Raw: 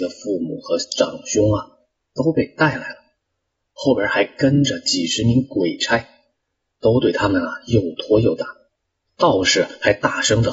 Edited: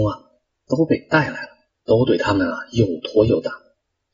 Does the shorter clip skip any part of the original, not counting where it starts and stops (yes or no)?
yes